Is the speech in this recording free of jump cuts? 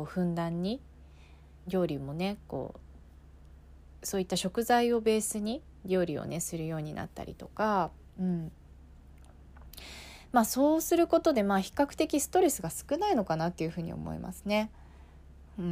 no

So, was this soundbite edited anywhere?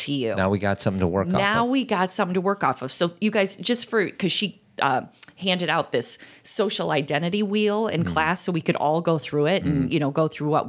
no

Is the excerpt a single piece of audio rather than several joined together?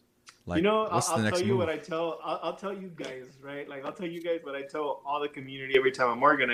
yes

